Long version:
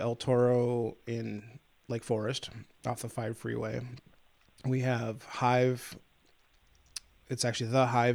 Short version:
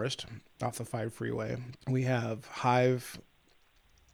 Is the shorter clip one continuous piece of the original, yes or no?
no